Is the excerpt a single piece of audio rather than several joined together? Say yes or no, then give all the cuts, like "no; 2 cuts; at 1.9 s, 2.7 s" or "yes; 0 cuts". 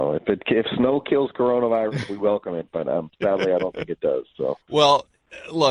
no; 1 cut; at 4.6 s